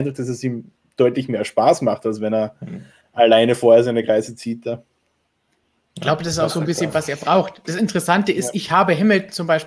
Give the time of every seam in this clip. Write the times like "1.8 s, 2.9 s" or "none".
none

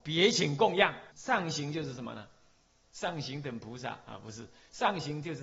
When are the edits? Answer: 1.1 s

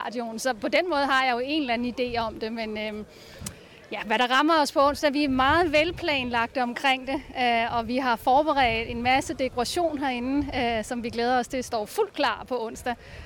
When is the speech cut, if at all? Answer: none

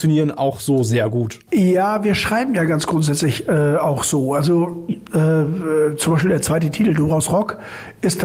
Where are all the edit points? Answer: none

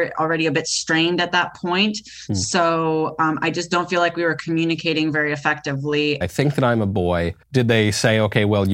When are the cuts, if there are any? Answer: 6.2 s, 7.4 s

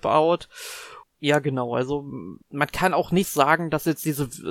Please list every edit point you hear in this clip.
1.0 s, 2.4 s

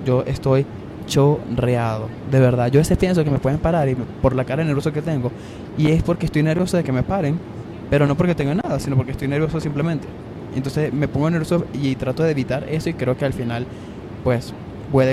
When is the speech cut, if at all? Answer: none

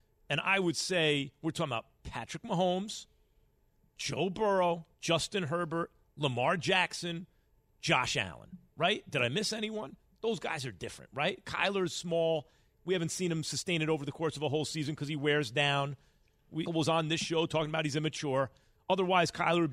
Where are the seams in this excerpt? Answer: 4.9 s, 16.7 s

